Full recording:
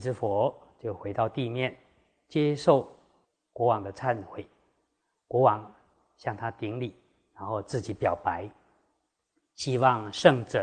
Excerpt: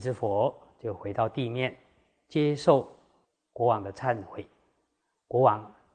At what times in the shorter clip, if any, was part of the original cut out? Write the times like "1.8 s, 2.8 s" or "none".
none